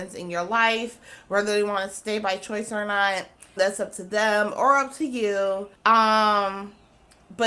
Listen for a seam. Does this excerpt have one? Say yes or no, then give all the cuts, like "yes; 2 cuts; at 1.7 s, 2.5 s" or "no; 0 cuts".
yes; 2 cuts; at 3.6 s, 5.8 s